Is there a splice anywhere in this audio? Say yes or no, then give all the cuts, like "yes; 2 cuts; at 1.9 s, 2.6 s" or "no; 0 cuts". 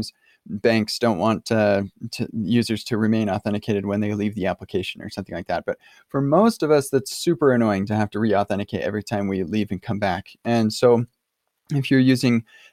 no; 0 cuts